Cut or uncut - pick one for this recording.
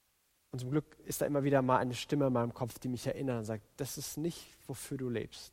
uncut